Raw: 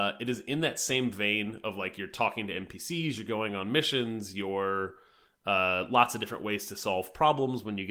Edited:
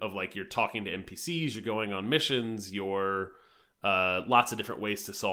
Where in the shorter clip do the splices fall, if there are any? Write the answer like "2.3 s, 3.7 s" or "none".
none